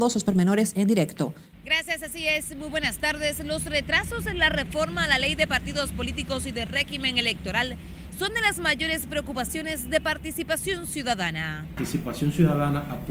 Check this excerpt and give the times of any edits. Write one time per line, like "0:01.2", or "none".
0:01.5